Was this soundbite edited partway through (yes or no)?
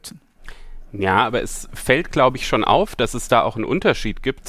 no